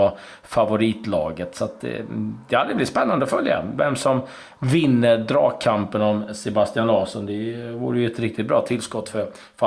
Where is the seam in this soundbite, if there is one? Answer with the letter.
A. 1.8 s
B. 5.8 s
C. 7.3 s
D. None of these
D